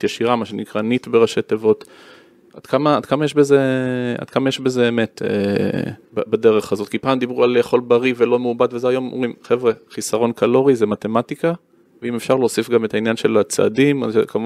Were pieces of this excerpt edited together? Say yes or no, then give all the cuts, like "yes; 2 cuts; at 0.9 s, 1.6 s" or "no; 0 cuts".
yes; 1 cut; at 6.0 s